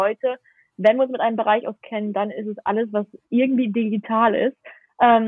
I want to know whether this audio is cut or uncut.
uncut